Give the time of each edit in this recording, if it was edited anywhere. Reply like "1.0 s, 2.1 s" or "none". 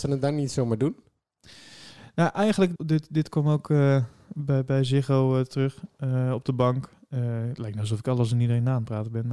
2.8 s